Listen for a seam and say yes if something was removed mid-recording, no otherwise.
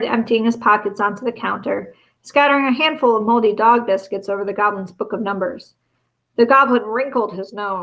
no